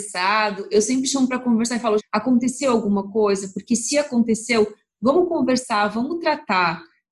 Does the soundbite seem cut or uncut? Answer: cut